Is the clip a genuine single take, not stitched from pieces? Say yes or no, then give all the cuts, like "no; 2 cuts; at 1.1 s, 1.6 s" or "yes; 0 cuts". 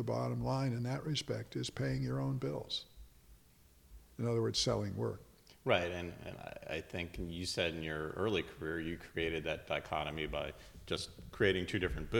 yes; 0 cuts